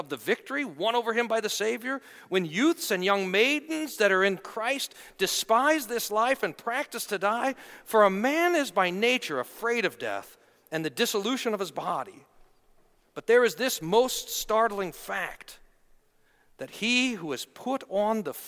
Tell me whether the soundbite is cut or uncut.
uncut